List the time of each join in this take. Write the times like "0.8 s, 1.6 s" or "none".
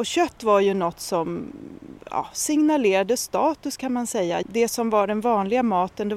4.4 s